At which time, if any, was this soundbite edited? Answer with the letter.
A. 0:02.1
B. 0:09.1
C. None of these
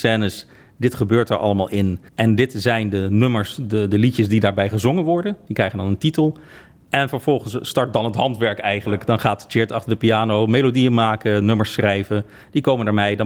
A